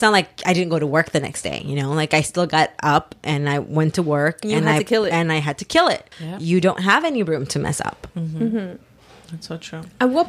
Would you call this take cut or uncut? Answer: cut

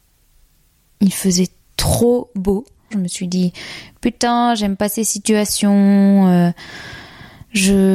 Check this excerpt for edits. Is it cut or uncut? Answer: cut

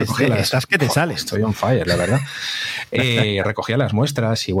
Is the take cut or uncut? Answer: uncut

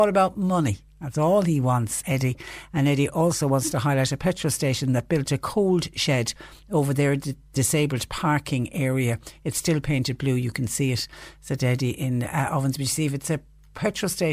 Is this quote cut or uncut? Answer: cut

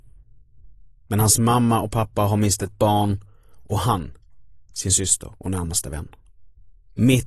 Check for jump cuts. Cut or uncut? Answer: uncut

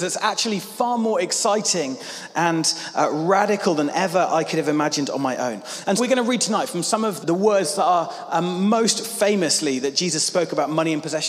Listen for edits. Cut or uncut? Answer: cut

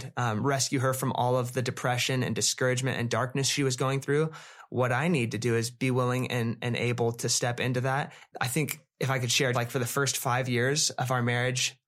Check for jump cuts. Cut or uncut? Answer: cut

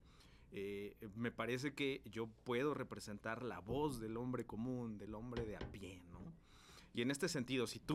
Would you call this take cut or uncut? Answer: uncut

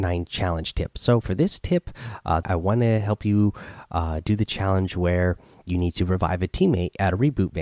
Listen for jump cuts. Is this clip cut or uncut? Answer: cut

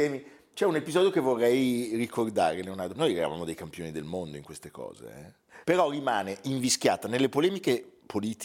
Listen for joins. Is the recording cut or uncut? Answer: cut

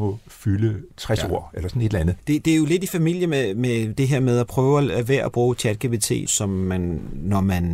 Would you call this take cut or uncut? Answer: cut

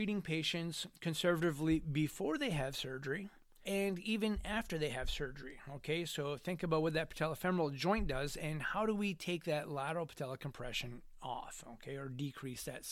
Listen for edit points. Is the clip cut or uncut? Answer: cut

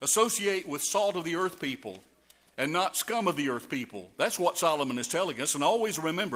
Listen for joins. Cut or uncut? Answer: uncut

